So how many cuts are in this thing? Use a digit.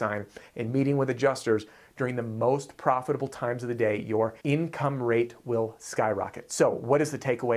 1